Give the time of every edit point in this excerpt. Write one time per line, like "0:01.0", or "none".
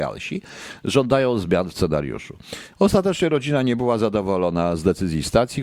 0:02.7